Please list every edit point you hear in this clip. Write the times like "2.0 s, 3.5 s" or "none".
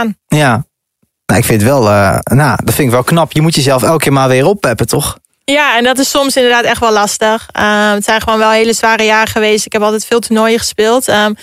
none